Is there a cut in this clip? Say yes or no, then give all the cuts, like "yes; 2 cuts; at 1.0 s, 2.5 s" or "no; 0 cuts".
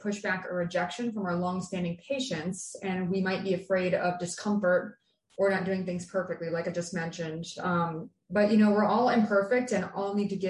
no; 0 cuts